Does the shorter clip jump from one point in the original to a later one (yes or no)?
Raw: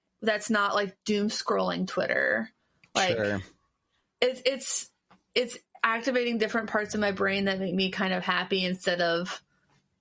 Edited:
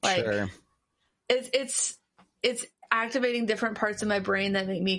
no